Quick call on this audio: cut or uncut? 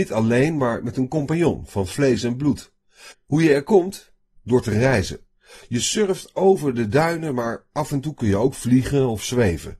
cut